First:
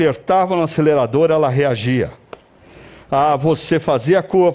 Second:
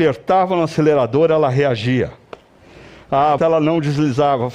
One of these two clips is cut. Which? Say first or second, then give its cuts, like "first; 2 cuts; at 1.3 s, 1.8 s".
second; 1 cut; at 3.4 s